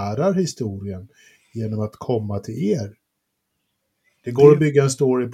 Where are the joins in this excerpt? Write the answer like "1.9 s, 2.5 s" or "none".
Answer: none